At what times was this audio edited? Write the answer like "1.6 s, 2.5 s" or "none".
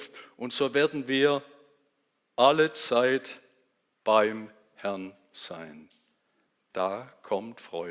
none